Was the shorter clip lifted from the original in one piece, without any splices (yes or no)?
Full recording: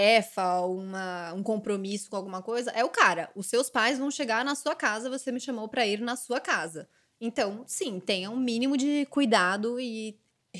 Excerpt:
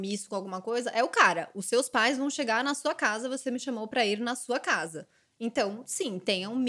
yes